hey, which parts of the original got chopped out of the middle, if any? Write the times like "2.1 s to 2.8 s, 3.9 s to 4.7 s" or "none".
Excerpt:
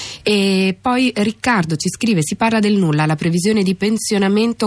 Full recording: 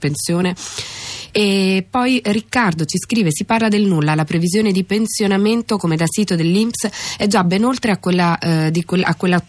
none